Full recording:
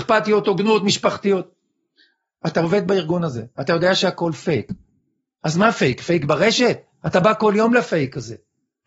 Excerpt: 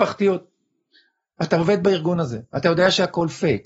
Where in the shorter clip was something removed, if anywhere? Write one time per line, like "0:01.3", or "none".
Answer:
none